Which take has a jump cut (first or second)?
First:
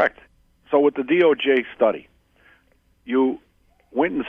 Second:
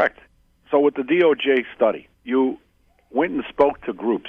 second